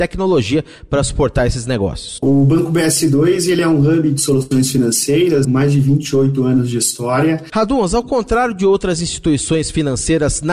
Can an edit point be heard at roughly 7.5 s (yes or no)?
yes